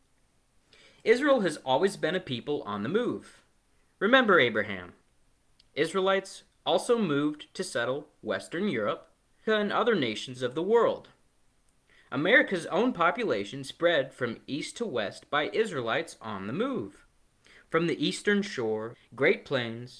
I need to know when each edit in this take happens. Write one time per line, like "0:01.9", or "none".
0:09.5
0:18.9